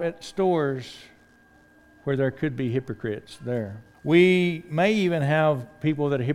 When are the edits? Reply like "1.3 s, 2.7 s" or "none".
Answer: 3.9 s